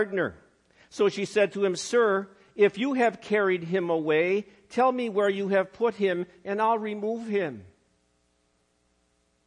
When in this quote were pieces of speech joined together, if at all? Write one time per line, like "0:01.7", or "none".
none